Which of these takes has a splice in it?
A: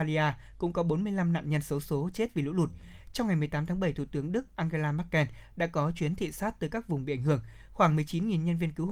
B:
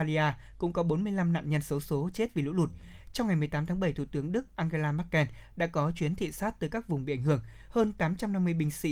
B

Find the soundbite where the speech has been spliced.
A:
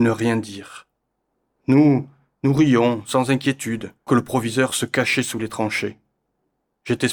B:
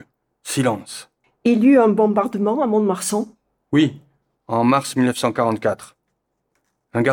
A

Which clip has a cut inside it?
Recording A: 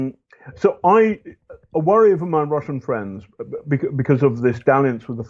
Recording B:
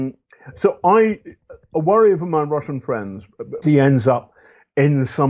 B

